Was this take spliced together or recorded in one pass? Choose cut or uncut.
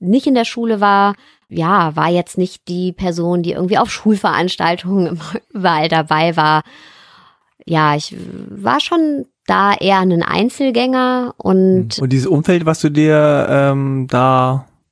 cut